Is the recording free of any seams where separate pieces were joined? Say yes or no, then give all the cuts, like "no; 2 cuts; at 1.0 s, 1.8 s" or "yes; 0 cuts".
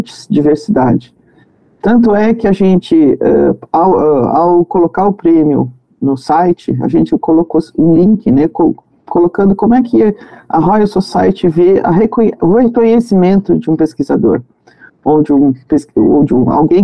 yes; 0 cuts